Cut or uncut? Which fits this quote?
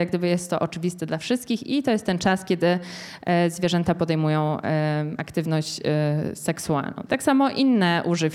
cut